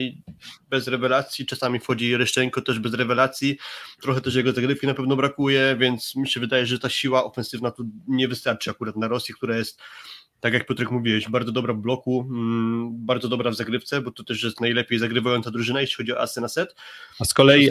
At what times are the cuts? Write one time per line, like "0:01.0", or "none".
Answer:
none